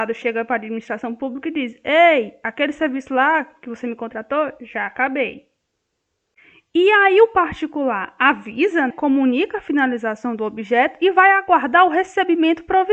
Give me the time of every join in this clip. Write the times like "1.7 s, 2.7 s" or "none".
8.9 s